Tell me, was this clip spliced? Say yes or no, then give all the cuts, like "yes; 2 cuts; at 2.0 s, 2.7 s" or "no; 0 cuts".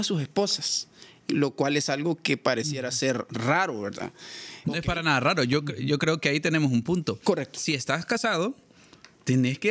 yes; 1 cut; at 4.6 s